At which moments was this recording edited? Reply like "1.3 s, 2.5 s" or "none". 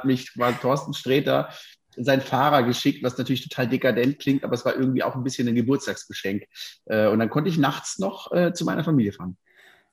none